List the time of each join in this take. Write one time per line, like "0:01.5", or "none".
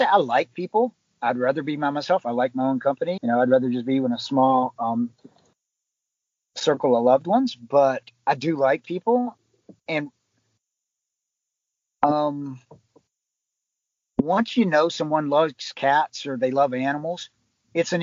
0:03.2